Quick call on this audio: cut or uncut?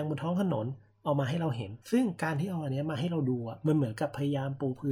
cut